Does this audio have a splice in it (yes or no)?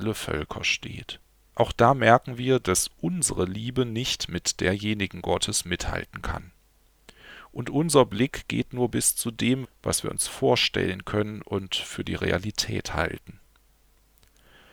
yes